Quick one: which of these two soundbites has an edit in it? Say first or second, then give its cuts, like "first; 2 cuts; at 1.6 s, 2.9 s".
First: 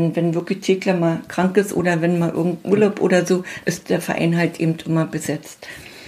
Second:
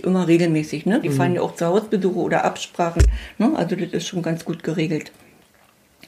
second; 1 cut; at 1.0 s